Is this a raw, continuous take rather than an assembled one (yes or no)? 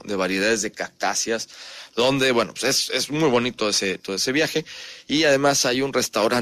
yes